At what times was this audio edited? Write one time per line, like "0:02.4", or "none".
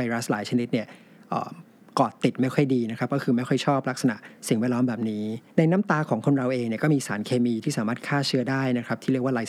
0:05.5